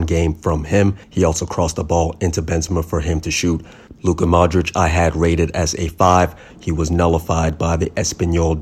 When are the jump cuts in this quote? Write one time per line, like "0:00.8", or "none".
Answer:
0:01.0
0:03.9
0:06.5